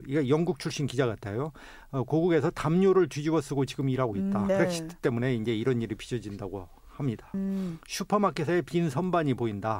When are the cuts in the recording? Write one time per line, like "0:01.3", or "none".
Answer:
0:04.5
0:07.3